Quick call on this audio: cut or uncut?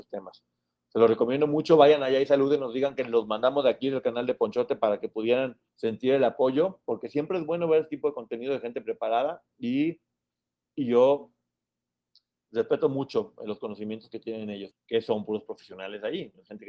cut